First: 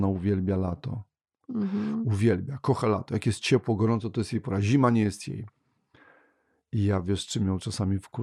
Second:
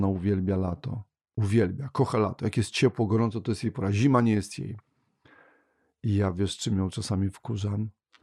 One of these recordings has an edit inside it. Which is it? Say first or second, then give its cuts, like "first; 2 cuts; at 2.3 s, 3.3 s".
second; 1 cut; at 1.4 s